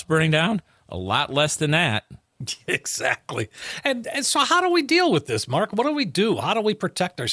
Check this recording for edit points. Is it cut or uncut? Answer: uncut